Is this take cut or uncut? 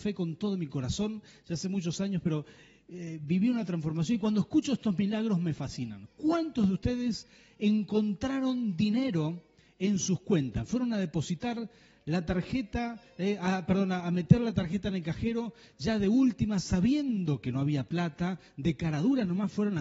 uncut